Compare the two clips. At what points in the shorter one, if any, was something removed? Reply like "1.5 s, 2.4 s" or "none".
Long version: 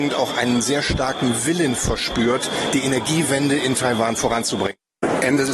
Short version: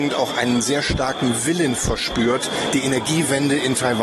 none